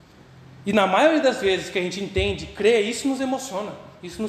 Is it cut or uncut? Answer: uncut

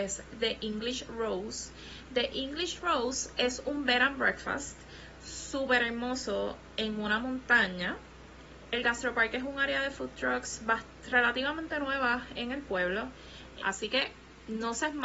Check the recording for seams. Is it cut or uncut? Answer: cut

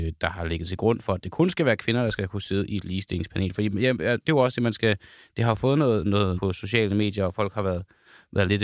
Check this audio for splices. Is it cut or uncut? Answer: cut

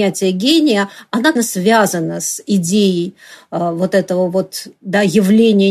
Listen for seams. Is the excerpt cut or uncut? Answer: cut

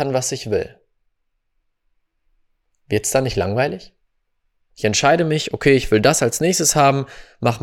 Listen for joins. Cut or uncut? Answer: cut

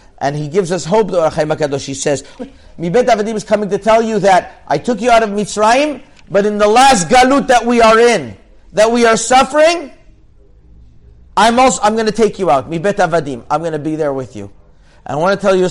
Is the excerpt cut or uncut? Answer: cut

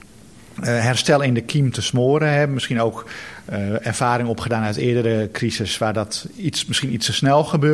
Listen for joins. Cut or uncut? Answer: uncut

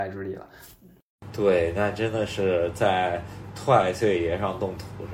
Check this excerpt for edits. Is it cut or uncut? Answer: cut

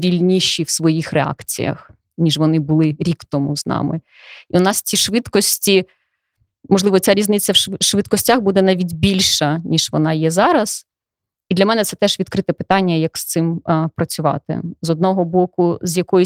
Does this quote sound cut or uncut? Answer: uncut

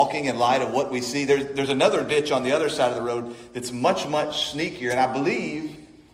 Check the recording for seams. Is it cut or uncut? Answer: uncut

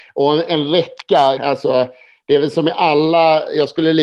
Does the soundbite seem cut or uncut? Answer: cut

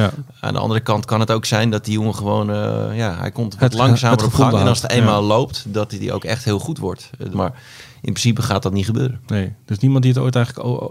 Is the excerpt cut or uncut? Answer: cut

